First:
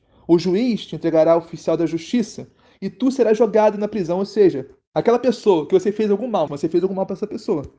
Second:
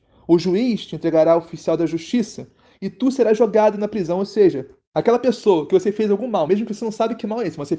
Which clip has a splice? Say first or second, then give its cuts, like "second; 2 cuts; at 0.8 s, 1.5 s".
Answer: first; 1 cut; at 6.5 s